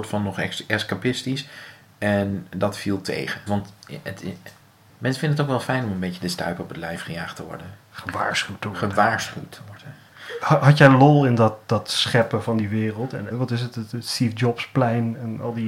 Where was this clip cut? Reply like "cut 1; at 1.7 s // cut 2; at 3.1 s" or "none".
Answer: cut 1; at 3.5 s // cut 2; at 13.3 s